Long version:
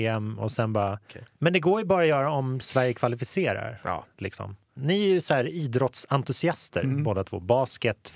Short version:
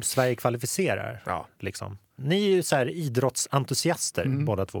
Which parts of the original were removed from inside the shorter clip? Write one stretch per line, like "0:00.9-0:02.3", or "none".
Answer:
none